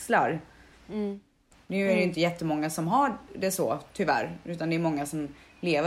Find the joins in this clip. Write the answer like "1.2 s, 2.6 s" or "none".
1.5 s